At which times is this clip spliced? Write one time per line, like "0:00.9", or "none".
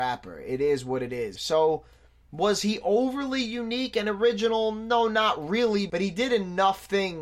0:01.4